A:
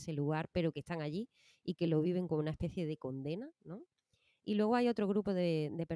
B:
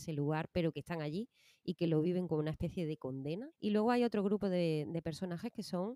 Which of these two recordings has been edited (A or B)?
B